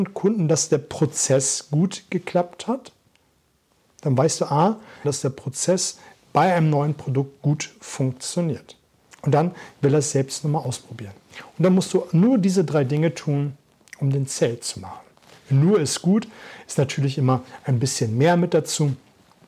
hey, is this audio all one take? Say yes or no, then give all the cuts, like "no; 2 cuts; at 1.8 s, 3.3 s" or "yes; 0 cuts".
no; 1 cut; at 5.0 s